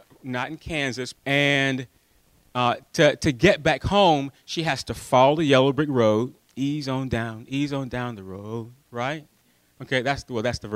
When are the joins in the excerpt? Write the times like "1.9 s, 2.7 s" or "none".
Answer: 1.1 s

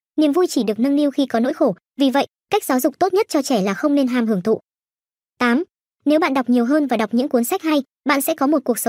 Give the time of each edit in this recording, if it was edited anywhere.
5.9 s

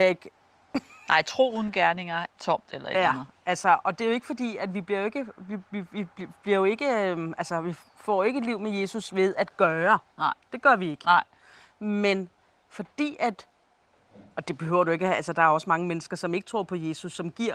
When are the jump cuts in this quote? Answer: 2.3 s

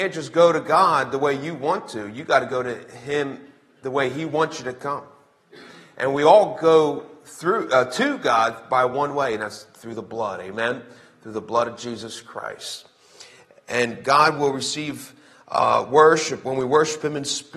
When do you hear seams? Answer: none

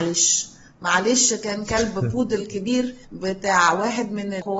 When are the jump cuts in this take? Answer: 3.0 s

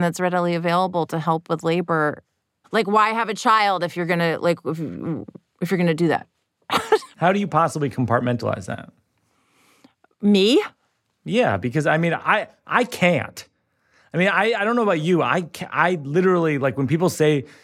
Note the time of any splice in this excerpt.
2.6 s, 7.1 s

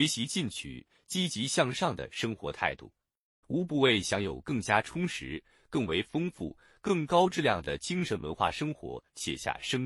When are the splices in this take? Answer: 3.4 s

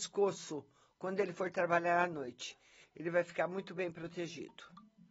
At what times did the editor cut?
2.8 s

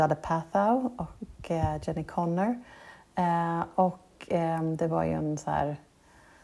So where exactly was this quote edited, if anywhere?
none

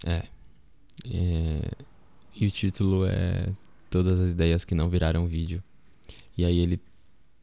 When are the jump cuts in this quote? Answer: 1.0 s

